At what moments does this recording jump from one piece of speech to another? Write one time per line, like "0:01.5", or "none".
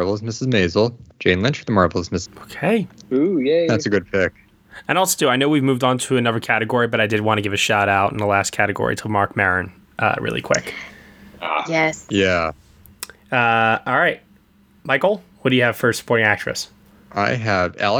0:02.3